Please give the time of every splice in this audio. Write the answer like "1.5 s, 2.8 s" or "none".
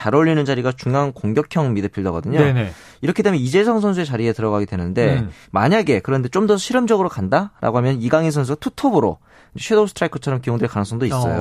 5.4 s